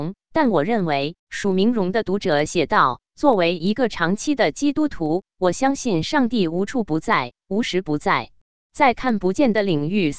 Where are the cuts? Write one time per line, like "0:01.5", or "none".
0:01.2
0:08.6